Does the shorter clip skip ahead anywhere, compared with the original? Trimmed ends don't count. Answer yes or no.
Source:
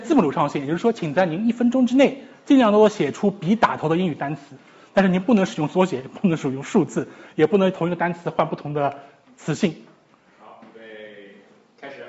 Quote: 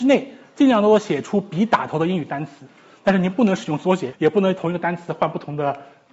yes